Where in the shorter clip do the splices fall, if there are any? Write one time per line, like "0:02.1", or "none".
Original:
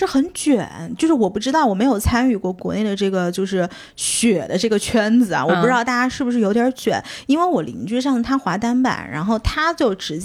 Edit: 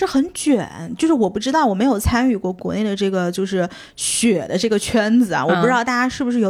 none